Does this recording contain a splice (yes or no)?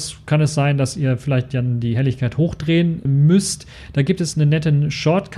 yes